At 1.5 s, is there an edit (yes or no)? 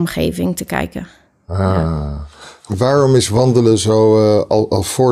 no